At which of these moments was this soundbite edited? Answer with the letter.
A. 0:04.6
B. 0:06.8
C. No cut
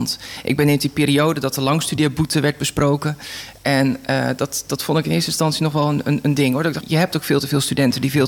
B